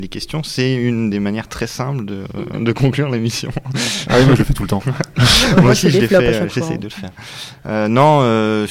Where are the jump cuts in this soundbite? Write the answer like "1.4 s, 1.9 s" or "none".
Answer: none